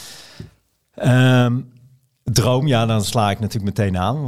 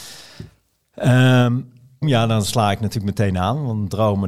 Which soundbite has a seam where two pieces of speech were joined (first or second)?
second